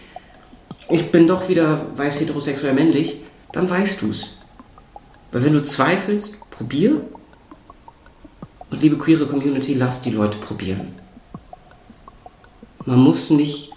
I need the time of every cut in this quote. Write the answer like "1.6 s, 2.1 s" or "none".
3.4 s